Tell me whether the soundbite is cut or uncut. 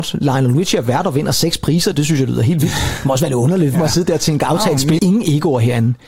cut